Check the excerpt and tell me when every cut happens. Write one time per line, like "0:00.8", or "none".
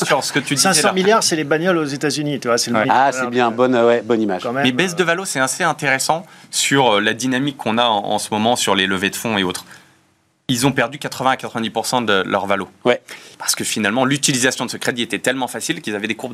0:02.8
0:13.3